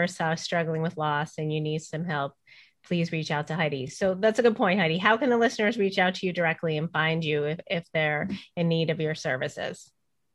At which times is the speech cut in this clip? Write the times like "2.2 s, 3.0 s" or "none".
none